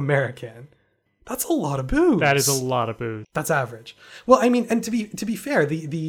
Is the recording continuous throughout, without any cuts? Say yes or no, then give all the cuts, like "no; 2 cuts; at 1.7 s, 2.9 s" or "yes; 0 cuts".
no; 2 cuts; at 1.1 s, 3.2 s